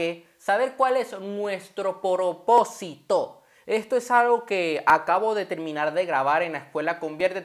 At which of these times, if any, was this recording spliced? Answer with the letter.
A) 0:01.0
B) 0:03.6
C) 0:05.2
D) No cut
D